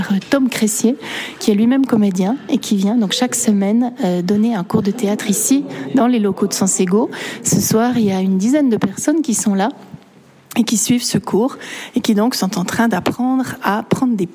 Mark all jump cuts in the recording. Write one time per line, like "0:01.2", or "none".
none